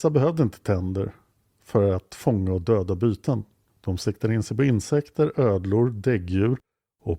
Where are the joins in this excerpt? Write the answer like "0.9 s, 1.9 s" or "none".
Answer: none